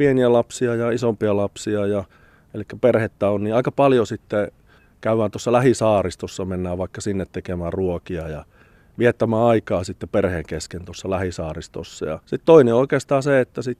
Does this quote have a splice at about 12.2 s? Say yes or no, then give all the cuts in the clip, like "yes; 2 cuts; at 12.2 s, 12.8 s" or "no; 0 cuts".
yes; 1 cut; at 12.2 s